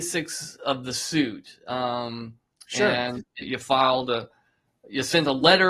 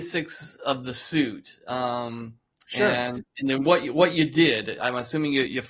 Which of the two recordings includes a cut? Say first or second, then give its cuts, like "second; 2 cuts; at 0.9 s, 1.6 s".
first; 1 cut; at 3.4 s